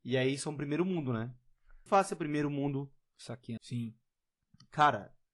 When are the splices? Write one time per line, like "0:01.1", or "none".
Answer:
0:01.9
0:03.6